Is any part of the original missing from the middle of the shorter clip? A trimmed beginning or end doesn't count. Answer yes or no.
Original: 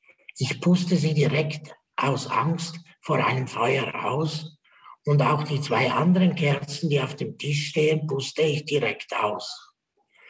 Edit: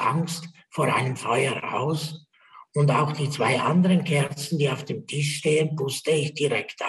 no